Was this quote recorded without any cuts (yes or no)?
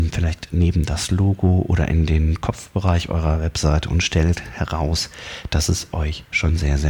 yes